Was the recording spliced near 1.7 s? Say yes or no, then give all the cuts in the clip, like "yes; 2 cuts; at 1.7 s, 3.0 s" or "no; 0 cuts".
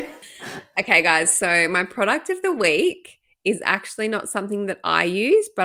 no; 0 cuts